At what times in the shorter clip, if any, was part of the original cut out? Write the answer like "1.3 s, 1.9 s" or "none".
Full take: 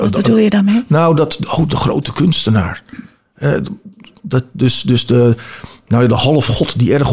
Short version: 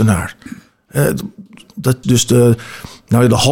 2.0 s

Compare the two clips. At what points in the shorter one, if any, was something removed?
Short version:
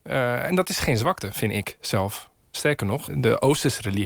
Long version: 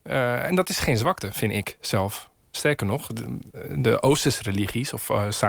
3.1 s

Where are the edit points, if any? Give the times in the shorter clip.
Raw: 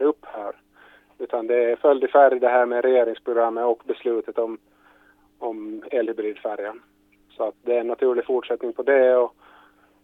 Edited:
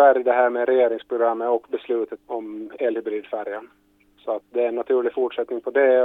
2.2 s

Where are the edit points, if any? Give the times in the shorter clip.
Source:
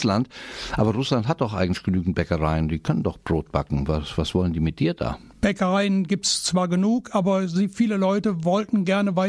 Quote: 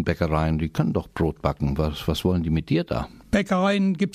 none

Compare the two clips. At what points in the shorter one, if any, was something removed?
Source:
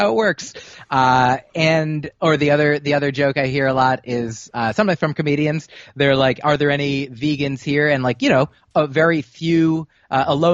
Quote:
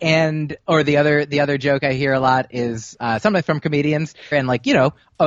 4.3 s

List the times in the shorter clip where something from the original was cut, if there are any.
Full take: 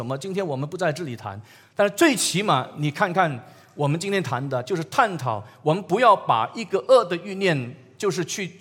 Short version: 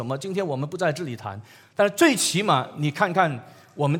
none

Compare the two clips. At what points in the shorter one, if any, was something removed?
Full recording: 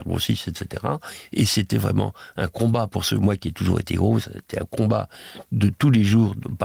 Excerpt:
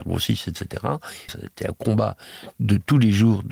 1.3 s

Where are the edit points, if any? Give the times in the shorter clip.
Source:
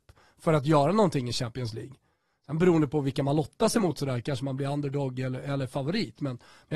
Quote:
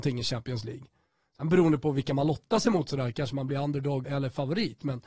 4.0 s

